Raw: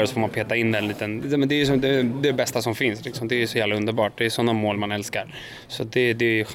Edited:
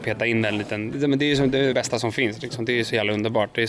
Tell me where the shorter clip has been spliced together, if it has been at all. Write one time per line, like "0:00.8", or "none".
0:01.7